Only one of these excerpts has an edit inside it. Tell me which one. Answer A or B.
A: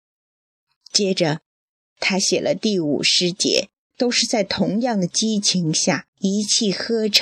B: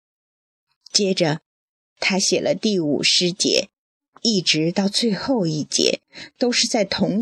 A